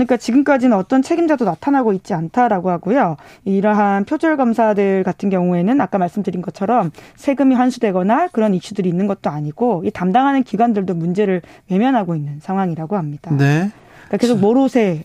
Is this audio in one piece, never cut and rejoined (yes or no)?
yes